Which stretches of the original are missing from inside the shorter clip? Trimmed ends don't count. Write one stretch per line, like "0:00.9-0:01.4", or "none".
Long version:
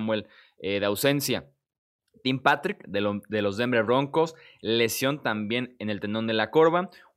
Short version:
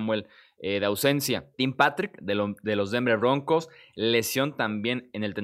0:01.5-0:02.2